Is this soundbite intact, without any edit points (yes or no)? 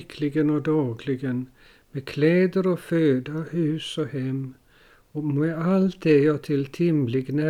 yes